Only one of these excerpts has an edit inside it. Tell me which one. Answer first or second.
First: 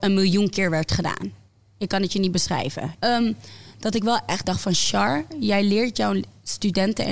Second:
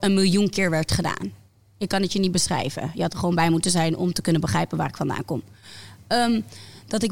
first